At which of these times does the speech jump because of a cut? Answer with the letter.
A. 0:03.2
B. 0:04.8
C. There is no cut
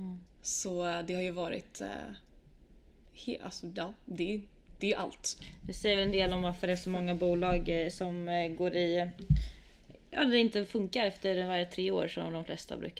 B